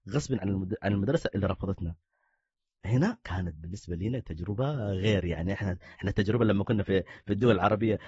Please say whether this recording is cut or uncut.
uncut